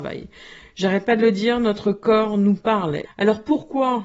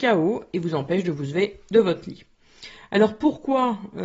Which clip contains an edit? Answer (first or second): first